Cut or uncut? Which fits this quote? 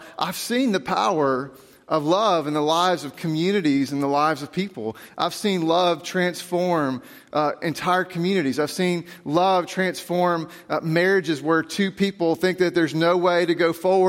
uncut